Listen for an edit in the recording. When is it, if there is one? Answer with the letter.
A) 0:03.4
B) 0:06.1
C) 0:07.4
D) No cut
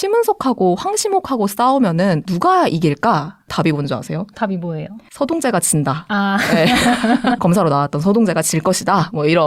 C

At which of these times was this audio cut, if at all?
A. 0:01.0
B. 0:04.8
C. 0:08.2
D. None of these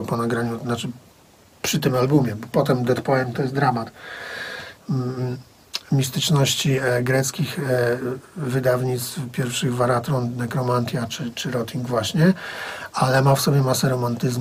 B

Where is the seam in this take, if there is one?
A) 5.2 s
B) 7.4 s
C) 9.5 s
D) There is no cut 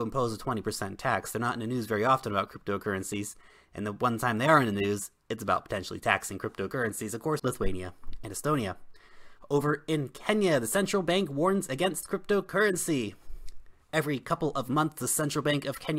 B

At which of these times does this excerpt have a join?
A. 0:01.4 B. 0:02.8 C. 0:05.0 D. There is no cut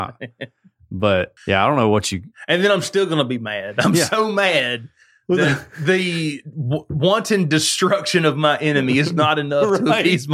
A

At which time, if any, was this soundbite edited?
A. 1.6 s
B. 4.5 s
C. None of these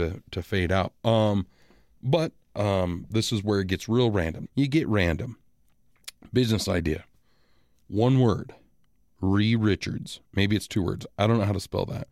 B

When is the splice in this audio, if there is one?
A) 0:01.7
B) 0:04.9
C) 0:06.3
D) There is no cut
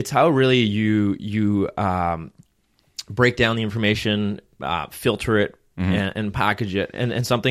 D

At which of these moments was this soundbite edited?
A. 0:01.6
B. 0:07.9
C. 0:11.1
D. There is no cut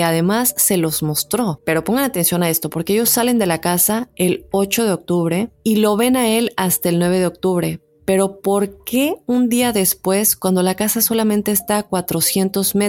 A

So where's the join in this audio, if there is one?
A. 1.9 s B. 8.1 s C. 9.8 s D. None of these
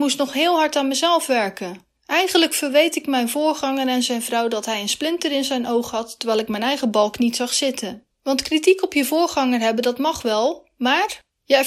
B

